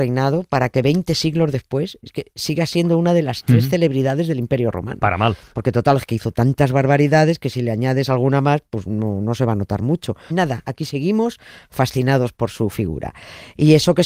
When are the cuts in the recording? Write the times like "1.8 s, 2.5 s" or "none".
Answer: 5.5 s, 10.3 s